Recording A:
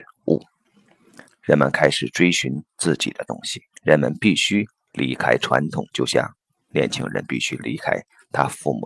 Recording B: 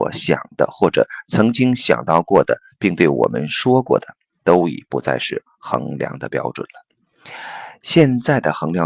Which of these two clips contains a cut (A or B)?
A